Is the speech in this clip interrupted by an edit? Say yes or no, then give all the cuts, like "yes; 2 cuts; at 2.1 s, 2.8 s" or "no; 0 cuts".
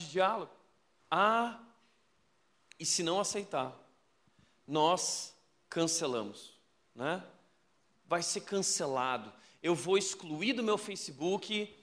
yes; 1 cut; at 1.0 s